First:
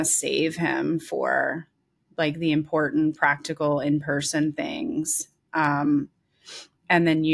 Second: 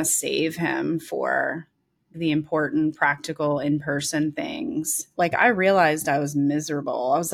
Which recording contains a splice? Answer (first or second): second